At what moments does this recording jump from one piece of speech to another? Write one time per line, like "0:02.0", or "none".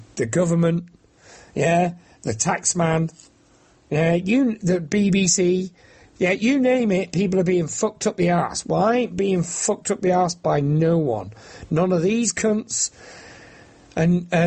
none